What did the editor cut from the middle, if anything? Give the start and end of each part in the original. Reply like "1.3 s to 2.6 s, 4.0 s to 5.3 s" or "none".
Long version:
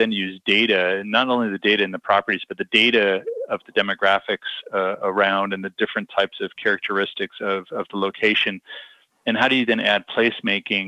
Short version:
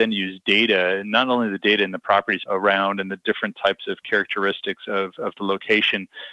2.5 s to 5.0 s